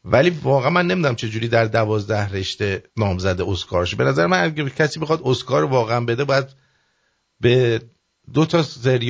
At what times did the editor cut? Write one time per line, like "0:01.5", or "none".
0:02.9